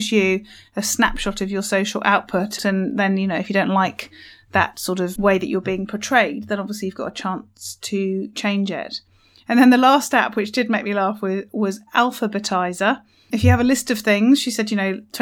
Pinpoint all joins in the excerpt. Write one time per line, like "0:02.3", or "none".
0:02.6
0:05.2
0:13.3